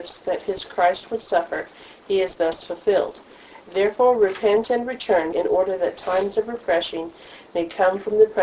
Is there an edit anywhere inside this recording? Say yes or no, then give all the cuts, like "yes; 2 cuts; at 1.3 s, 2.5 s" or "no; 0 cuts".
yes; 1 cut; at 5.3 s